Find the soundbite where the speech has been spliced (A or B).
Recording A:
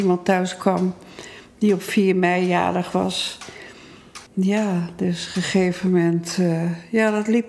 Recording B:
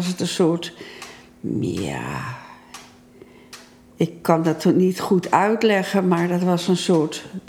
A